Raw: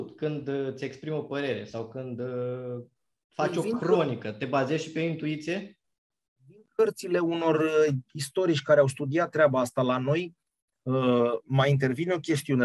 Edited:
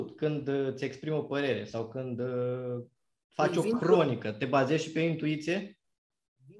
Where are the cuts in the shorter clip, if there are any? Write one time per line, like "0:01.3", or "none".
none

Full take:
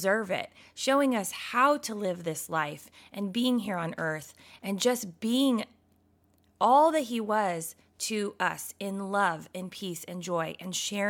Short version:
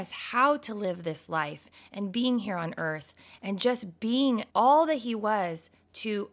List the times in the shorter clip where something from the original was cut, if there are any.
0:04.5

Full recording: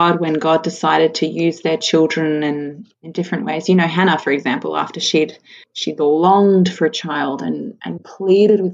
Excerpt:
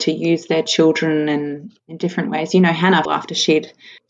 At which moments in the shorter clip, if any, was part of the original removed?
0:03.1

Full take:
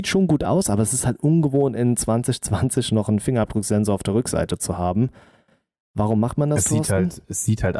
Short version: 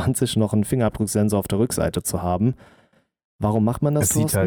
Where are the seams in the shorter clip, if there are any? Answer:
none

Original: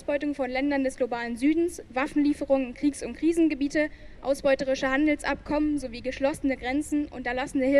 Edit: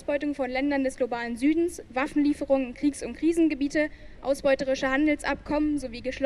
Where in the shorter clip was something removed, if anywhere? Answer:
none

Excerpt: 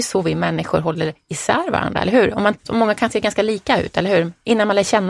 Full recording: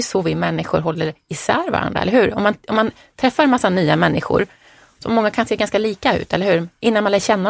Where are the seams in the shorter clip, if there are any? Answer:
0:02.6

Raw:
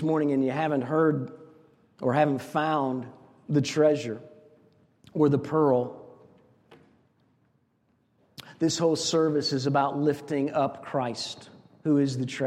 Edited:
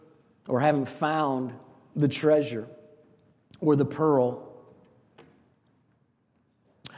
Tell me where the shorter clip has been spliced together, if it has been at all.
none

